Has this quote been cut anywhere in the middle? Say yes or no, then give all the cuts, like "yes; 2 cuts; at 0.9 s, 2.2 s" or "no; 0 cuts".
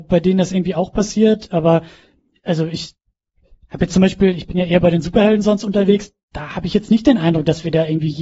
no; 0 cuts